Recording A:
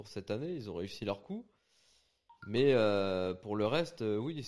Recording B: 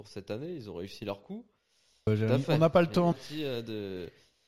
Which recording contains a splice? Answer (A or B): B